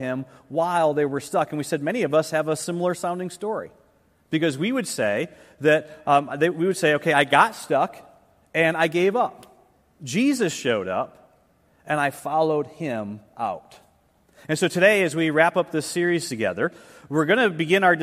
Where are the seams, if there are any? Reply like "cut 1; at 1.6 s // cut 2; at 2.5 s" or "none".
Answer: none